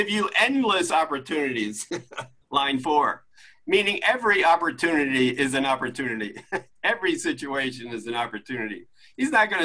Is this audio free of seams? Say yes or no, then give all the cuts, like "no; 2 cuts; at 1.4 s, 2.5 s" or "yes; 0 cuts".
yes; 0 cuts